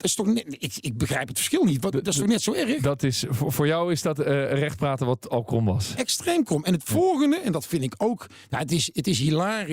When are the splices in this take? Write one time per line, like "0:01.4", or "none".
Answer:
none